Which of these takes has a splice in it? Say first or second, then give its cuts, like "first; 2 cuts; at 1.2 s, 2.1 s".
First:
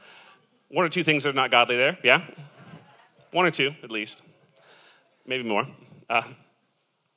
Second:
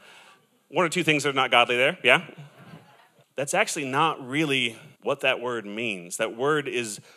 second; 2 cuts; at 3.2 s, 4.9 s